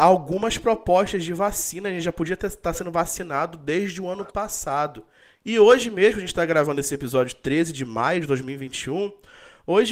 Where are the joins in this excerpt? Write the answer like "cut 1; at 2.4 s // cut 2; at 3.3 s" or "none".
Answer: cut 1; at 5.4 s